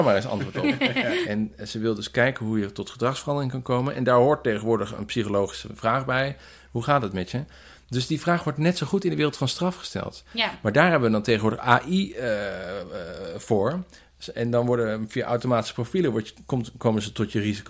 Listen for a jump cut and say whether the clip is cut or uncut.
cut